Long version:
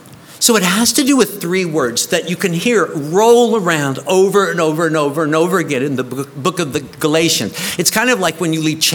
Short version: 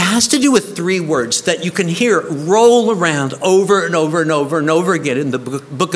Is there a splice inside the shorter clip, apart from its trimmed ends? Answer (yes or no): no